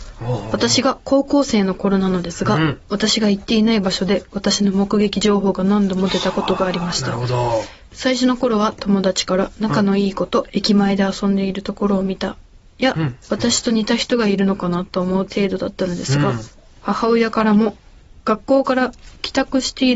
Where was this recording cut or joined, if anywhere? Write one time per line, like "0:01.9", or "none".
0:13.2